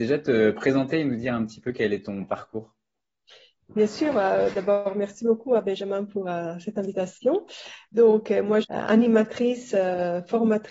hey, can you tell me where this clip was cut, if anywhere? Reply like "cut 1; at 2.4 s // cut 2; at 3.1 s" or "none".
cut 1; at 8.6 s